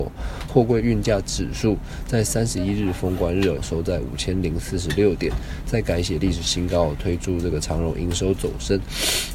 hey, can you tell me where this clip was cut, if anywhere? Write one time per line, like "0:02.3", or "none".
0:03.6